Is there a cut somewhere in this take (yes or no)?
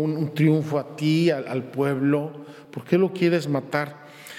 no